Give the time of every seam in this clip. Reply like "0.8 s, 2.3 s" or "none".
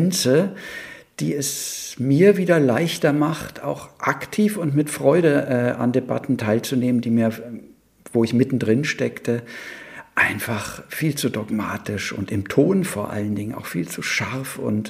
none